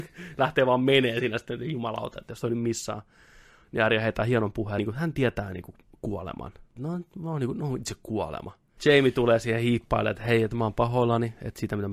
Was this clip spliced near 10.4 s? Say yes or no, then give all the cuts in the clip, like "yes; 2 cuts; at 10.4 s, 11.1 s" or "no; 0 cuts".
no; 3 cuts; at 4.8 s, 6.8 s, 8.8 s